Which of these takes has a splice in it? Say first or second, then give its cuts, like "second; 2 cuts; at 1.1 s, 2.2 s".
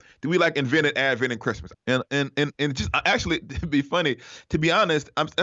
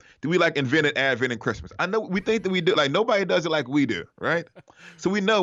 first; 1 cut; at 1.7 s